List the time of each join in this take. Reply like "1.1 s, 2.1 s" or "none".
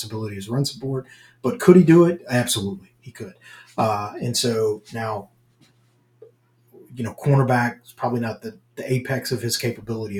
none